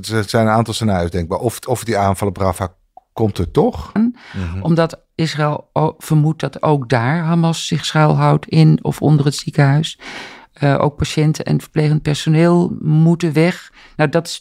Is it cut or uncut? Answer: cut